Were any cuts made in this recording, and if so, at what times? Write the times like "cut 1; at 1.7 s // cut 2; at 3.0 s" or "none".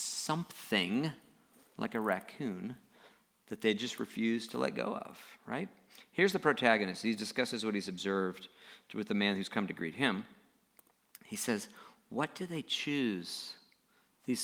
none